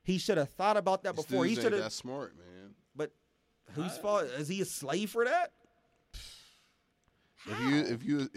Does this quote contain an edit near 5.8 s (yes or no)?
no